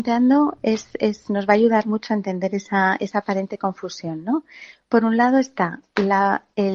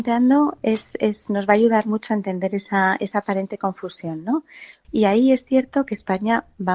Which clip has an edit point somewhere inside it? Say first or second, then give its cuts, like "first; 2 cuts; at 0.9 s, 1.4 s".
second; 1 cut; at 4.8 s